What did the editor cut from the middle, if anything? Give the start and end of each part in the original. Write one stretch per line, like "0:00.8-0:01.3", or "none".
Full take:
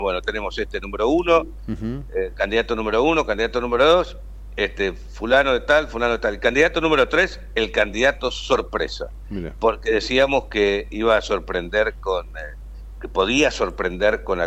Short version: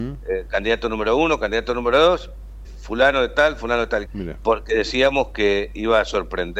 0:04.5-0:05.0
0:06.4-0:09.2